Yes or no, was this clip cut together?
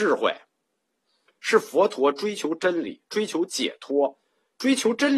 yes